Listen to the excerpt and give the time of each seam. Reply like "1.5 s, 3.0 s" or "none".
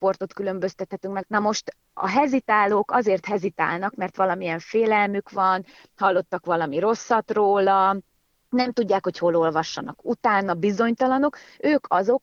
1.2 s